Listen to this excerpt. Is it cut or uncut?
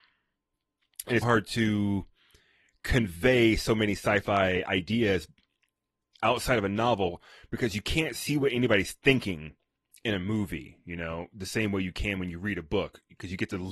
cut